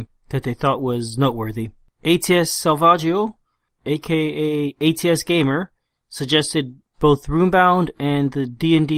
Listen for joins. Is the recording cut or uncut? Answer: uncut